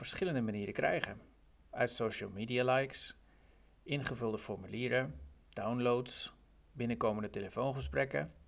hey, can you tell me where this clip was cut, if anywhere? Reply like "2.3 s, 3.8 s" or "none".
none